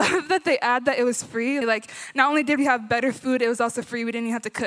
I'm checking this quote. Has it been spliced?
yes; 1 cut; at 1.6 s

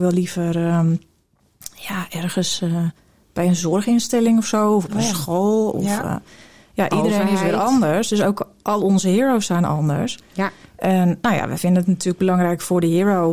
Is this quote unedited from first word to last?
yes; 0 cuts

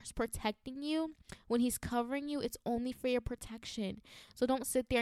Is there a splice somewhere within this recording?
no; 0 cuts

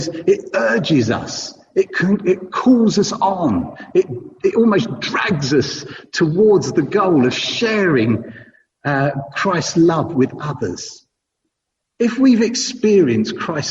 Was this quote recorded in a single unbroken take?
yes; 0 cuts

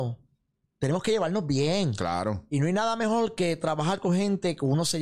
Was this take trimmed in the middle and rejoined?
no; 0 cuts

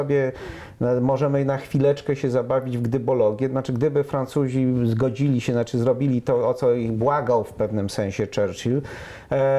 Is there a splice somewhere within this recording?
no; 0 cuts

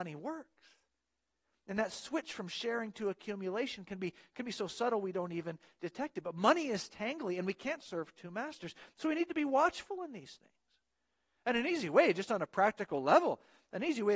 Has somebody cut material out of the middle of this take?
no; 0 cuts

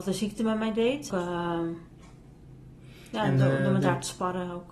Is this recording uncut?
no; 1 cut; at 1.1 s

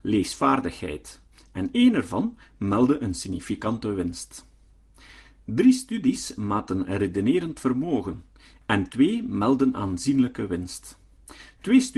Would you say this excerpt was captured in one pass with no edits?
yes; 0 cuts

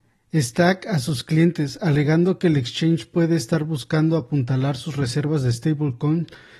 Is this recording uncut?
yes; 0 cuts

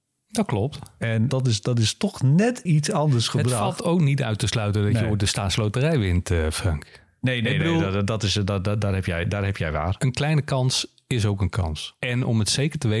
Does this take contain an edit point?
yes; 1 cut; at 2.7 s

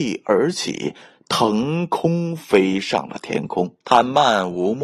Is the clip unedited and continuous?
no; 1 cut; at 3.8 s

